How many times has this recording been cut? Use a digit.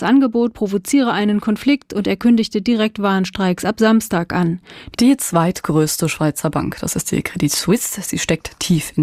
1